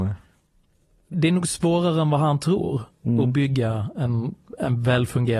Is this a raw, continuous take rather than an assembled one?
no; 1 cut; at 1.1 s

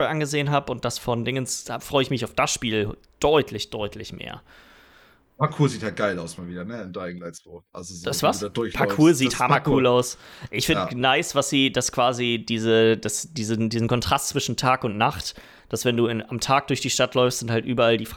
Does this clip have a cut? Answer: no; 0 cuts

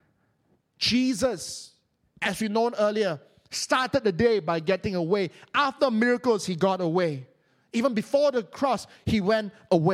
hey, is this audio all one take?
yes; 0 cuts

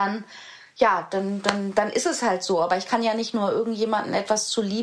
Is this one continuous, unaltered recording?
yes; 0 cuts

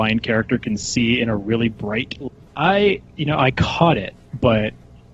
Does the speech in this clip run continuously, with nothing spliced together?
no; 1 cut; at 2.5 s

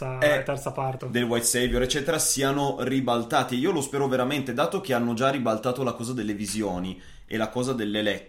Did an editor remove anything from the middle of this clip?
yes; 1 cut; at 1.0 s

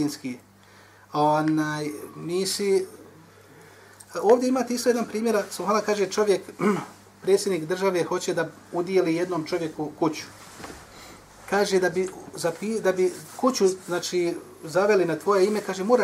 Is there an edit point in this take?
no; 0 cuts

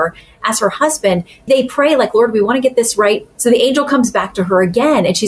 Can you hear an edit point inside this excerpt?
yes; 1 cut; at 3.3 s

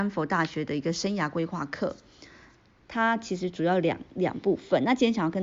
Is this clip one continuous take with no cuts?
no; 1 cut; at 2.9 s

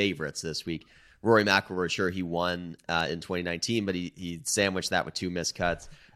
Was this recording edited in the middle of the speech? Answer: no; 0 cuts

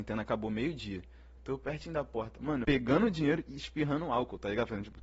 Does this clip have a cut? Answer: yes; 2 cuts; at 1.4 s, 2.6 s

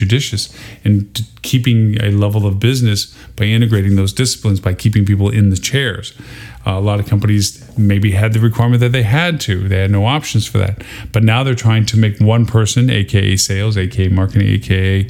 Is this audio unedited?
yes; 0 cuts

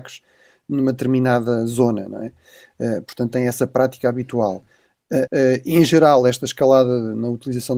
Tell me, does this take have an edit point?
yes; 1 cut; at 5.3 s

